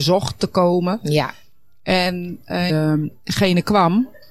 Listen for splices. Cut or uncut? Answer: cut